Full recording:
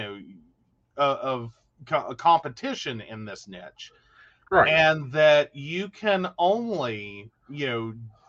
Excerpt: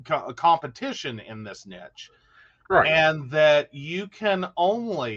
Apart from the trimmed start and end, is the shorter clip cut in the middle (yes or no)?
no